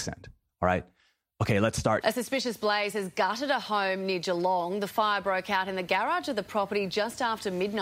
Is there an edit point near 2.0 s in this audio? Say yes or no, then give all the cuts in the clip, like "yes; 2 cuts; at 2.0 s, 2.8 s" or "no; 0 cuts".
yes; 1 cut; at 2.0 s